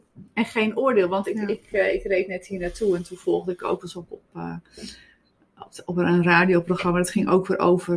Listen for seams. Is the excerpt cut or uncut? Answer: uncut